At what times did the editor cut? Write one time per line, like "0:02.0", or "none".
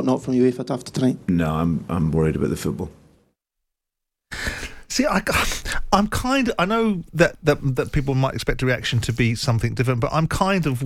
none

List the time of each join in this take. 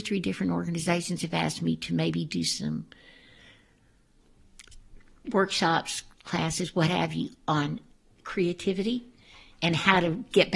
none

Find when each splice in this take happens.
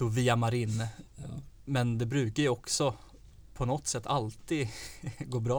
none

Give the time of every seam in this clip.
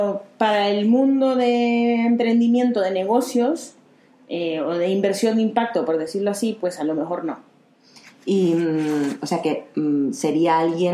none

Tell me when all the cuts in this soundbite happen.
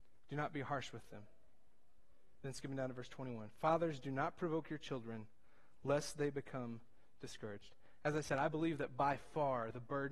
none

